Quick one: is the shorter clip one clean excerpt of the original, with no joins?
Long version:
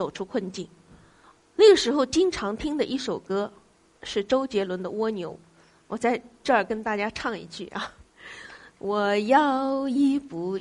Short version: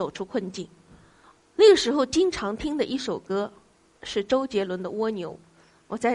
yes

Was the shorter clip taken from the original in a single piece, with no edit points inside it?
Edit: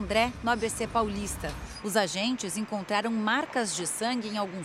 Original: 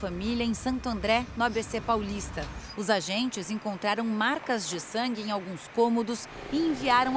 yes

